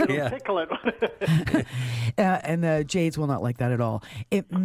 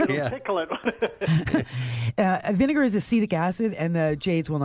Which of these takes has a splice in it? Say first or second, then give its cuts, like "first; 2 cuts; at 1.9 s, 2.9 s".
first; 1 cut; at 2.4 s